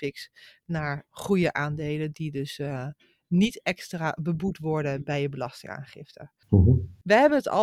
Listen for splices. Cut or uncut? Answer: cut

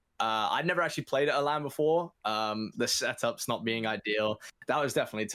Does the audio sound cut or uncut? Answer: cut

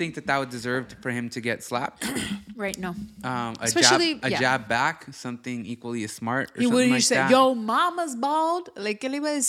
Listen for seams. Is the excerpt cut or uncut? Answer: uncut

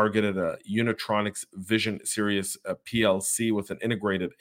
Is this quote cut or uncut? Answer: uncut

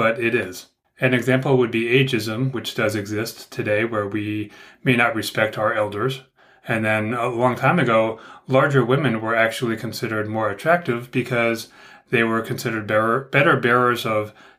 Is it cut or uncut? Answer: uncut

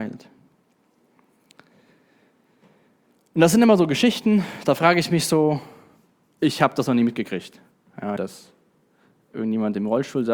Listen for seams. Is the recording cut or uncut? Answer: cut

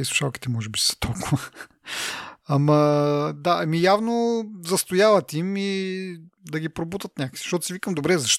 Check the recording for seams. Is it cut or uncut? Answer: uncut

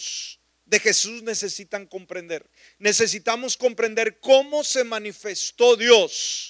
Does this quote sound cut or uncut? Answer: uncut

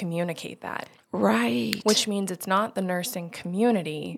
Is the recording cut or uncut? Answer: uncut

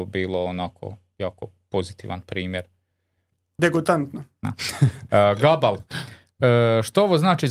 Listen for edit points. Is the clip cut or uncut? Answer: cut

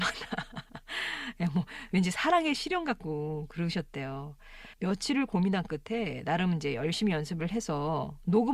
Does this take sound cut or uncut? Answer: cut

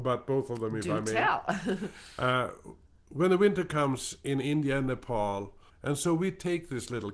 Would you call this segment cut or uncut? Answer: cut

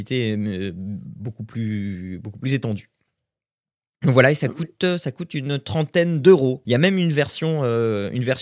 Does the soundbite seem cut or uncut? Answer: cut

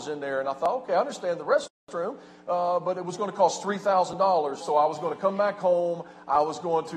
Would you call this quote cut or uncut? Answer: cut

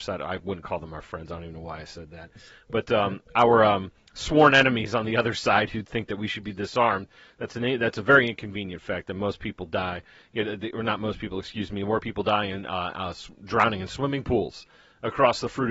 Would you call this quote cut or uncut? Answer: uncut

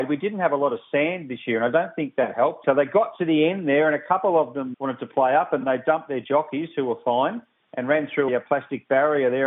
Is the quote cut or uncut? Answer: cut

